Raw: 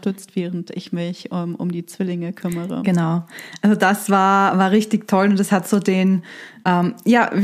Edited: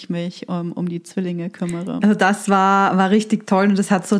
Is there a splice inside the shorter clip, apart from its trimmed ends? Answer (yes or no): yes